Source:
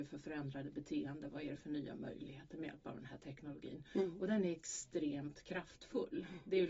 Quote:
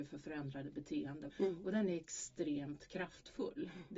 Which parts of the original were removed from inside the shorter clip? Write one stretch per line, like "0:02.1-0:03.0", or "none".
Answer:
0:01.3-0:03.9